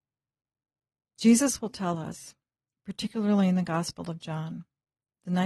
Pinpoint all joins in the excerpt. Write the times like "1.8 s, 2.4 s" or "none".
none